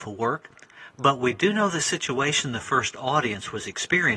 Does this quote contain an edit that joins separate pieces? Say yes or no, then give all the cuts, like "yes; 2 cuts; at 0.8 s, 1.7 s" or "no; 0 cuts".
no; 0 cuts